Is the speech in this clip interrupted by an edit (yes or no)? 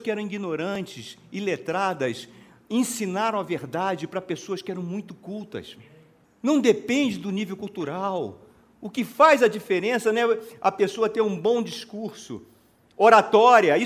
no